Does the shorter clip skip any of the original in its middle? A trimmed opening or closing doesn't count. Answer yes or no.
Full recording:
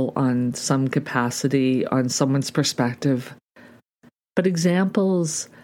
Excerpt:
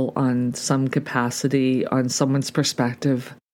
no